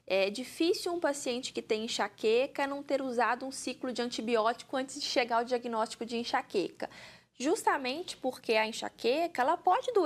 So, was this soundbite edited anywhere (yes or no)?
no